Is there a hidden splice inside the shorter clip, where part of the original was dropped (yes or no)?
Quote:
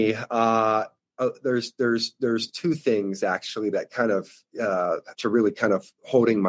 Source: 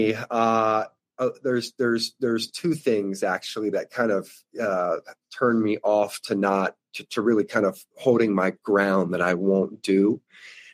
yes